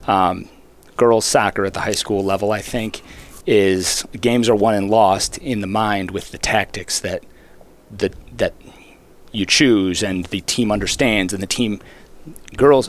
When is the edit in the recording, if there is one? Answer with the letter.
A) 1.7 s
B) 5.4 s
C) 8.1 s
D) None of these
D